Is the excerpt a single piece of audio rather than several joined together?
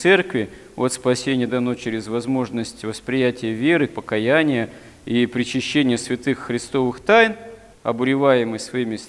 no; 2 cuts; at 3.9 s, 7.7 s

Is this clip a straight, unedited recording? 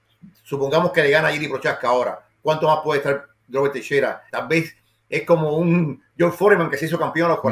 no; 1 cut; at 4.3 s

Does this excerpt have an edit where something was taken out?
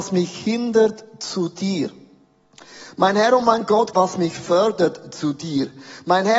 yes; 1 cut; at 3.9 s

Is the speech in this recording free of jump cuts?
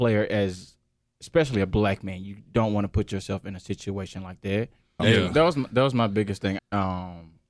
no; 2 cuts; at 5.0 s, 6.6 s

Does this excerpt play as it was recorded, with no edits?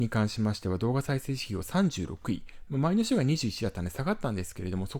yes; 0 cuts

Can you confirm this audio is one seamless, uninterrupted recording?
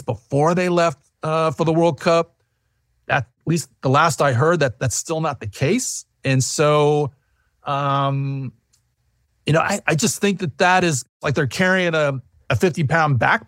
yes; 0 cuts

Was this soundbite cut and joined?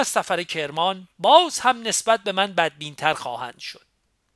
no; 0 cuts

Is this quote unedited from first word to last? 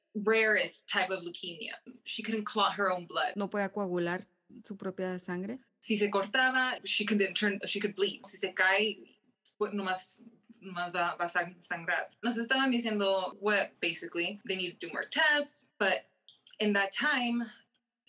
no; 1 cut; at 13.7 s

